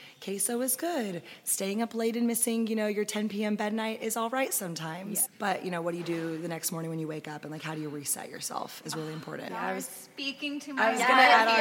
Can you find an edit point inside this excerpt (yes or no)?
yes